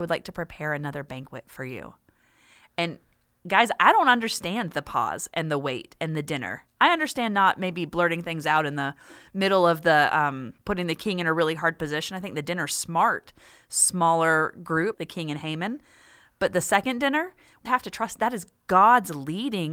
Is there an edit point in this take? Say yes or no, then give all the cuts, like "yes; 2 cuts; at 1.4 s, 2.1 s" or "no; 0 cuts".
yes; 3 cuts; at 10.6 s, 14.9 s, 17.7 s